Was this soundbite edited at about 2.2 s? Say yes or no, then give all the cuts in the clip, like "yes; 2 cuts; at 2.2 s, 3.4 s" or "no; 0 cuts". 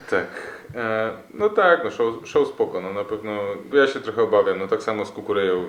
no; 1 cut; at 3.7 s